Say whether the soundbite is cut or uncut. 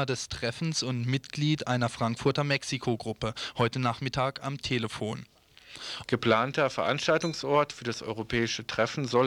cut